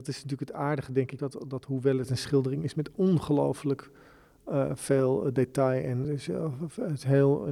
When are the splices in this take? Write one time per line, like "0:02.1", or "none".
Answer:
0:01.2
0:06.0